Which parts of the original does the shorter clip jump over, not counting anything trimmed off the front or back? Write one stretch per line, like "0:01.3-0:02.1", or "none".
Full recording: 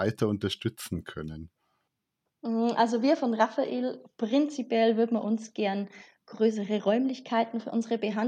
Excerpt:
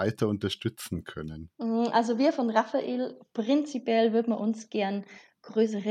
0:01.5-0:02.4